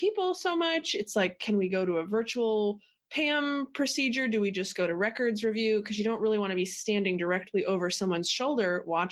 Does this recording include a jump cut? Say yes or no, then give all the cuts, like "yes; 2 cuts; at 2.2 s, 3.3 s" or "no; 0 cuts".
no; 0 cuts